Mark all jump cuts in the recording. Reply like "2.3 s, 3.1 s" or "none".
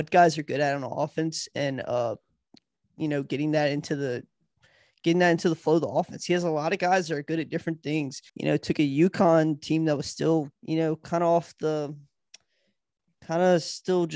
8.3 s, 10.6 s